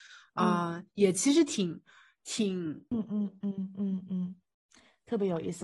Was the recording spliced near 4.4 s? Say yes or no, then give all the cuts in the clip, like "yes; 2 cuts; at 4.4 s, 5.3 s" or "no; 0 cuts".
no; 1 cut; at 2.9 s